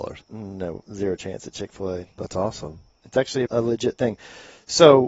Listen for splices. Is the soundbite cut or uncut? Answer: cut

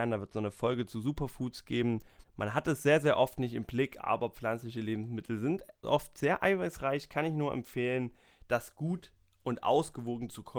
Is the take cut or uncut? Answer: cut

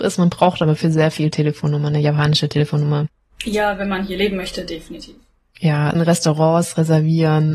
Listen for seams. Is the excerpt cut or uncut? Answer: cut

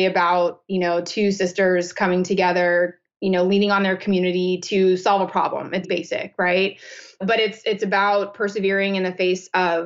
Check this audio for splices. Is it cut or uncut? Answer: cut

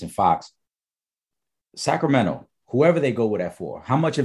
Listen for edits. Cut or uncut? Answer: uncut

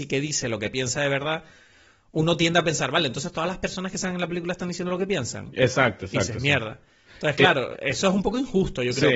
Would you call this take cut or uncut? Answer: cut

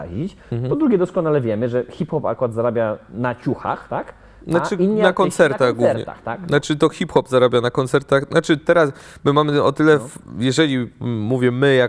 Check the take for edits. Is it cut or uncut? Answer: uncut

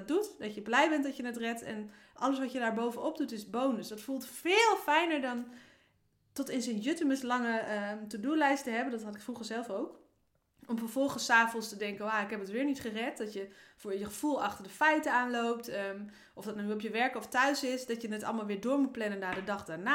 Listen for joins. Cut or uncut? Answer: uncut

